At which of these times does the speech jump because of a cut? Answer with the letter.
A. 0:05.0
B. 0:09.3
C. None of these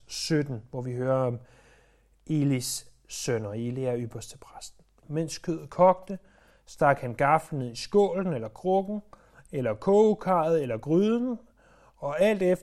A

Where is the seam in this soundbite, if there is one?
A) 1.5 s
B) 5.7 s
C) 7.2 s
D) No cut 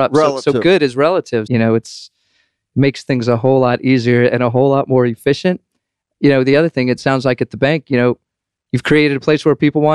A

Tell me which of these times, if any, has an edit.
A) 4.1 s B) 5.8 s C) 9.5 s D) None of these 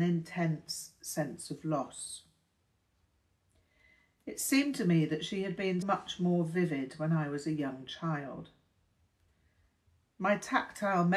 B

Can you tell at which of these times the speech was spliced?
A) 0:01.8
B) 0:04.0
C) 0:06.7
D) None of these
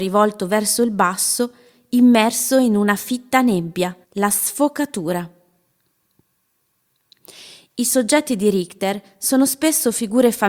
B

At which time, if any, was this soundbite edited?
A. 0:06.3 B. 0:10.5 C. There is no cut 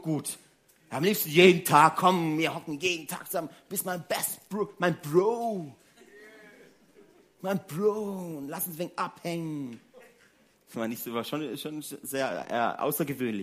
B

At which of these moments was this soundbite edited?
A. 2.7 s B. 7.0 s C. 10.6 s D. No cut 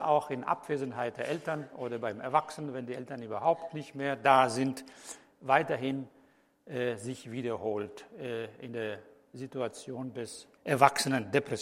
C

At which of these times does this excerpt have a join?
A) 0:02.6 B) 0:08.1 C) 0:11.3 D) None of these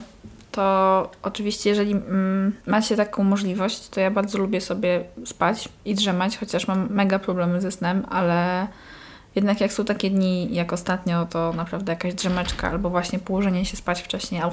A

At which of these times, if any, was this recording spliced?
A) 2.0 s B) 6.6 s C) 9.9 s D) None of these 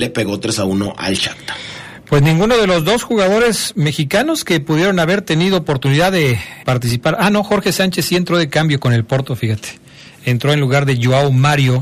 B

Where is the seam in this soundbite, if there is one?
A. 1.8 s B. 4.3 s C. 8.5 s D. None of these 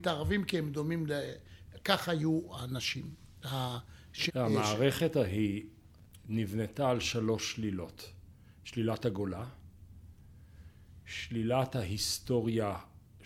B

